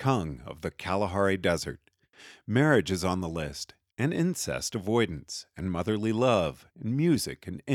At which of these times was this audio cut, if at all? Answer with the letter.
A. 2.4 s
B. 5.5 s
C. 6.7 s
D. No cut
C